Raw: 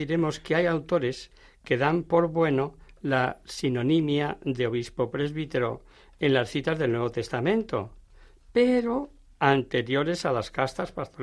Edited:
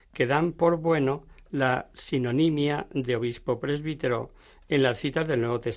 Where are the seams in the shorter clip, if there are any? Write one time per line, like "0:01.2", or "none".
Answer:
none